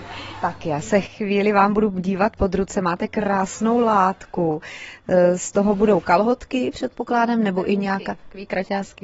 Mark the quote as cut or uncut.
uncut